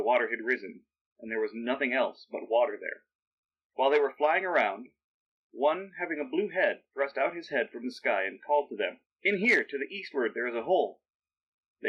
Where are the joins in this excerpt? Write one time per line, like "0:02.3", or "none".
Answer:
0:09.0